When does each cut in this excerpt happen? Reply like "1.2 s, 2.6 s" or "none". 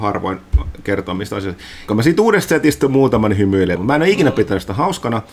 1.9 s, 3.8 s